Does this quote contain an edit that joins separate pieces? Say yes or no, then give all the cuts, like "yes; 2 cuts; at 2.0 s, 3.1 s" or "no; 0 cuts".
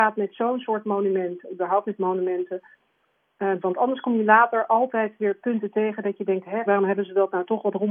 yes; 2 cuts; at 3.6 s, 6.7 s